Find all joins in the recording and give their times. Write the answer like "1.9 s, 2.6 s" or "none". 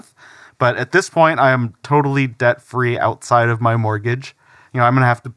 none